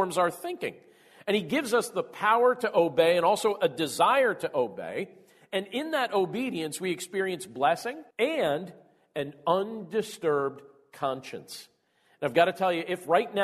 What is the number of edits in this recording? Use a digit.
1